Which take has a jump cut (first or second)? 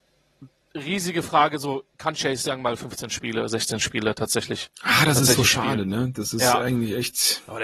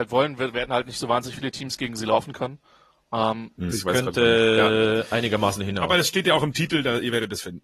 second